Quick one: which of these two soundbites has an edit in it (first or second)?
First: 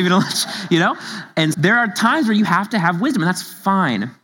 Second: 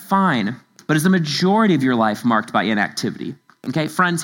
first